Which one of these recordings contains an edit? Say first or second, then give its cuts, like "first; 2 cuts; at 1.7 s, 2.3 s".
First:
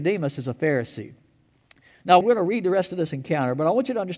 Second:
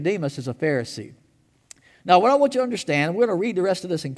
first; 1 cut; at 2.2 s